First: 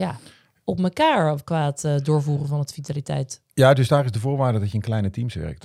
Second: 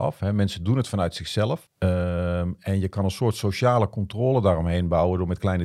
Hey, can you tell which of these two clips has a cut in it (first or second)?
second